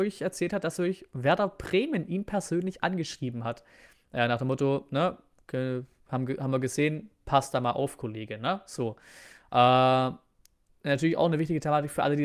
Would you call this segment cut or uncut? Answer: uncut